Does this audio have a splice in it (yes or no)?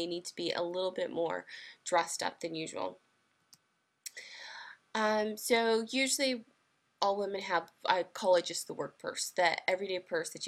no